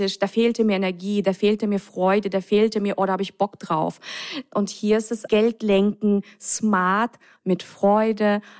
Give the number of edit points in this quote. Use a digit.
2